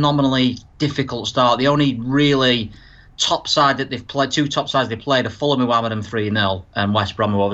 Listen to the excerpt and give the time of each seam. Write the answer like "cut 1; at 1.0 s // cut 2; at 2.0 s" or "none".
none